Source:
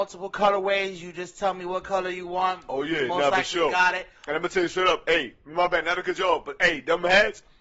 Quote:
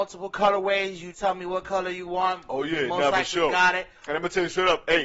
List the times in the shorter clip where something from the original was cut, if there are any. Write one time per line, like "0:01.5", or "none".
0:01.1